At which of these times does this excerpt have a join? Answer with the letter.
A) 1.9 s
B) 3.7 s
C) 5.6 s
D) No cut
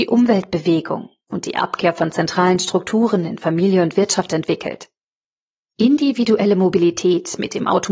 C